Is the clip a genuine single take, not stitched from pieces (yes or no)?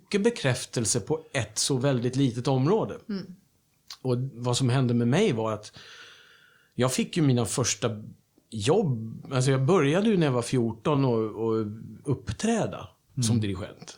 yes